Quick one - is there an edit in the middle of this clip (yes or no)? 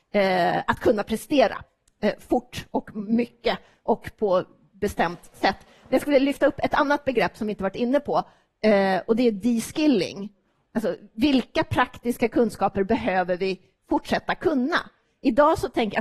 no